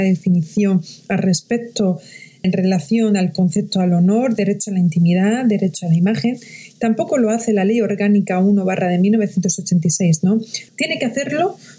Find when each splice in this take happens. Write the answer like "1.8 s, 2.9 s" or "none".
2.4 s, 10.7 s